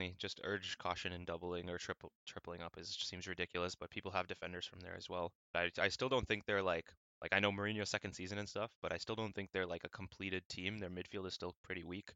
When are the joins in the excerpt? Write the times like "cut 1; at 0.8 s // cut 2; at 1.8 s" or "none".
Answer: cut 1; at 5.5 s